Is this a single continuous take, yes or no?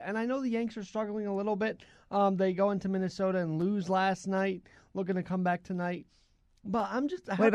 yes